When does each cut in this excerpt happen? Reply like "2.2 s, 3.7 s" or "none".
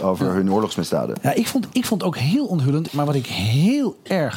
2.9 s